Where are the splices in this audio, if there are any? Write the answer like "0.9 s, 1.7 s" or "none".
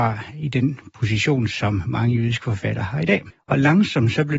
3.3 s